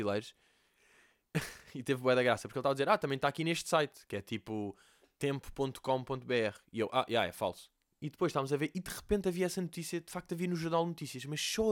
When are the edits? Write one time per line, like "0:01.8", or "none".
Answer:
0:07.9

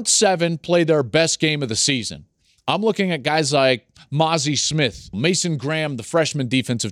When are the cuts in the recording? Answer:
0:05.1

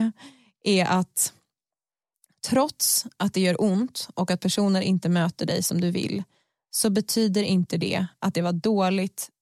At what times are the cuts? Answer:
none

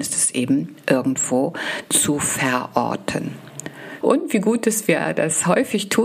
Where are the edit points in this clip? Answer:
0:04.0

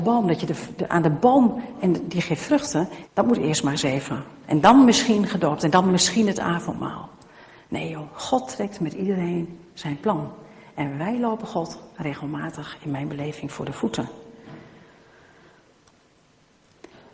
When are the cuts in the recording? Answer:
0:03.1

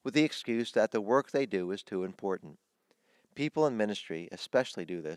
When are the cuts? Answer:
none

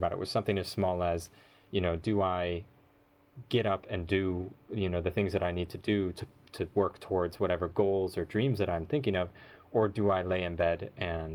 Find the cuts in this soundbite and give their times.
none

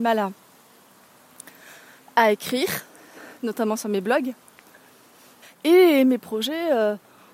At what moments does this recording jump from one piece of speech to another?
0:05.4

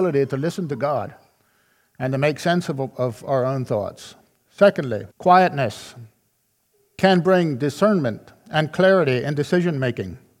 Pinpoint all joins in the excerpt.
0:05.1

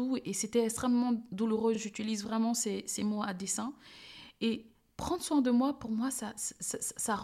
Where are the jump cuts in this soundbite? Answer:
none

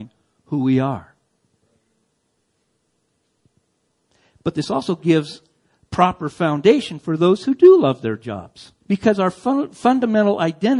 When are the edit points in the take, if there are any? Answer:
0:08.8

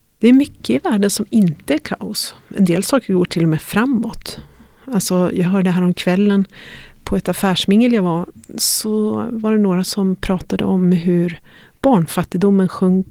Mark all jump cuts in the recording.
none

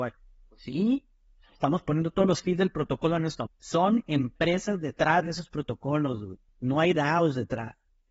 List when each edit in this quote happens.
0:03.5
0:06.5

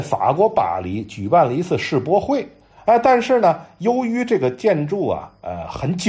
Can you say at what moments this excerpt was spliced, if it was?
0:02.8

